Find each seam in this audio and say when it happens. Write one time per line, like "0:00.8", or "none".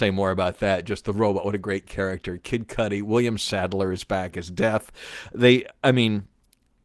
none